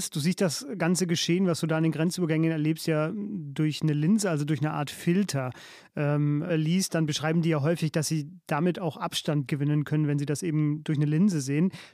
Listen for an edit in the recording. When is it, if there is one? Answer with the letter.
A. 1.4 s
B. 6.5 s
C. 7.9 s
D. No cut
B